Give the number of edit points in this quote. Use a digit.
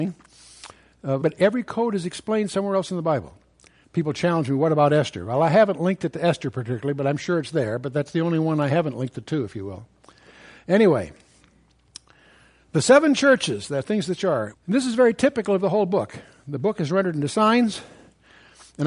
3